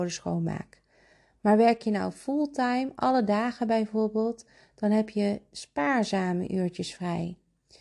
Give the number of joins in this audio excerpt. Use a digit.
0